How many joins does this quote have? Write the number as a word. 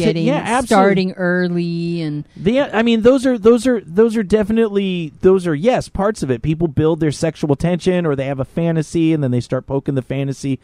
one